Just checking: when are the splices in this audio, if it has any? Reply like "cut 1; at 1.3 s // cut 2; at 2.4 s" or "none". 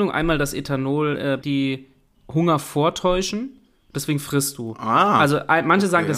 cut 1; at 1.4 s